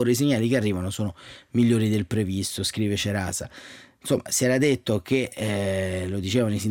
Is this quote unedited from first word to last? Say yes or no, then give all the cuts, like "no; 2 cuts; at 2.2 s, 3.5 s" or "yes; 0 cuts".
yes; 0 cuts